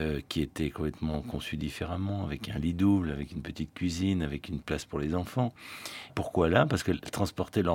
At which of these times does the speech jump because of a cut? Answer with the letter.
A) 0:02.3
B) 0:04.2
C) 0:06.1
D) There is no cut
C